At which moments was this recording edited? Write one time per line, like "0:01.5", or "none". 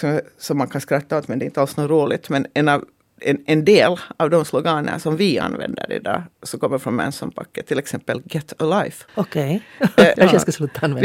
0:09.1
0:10.1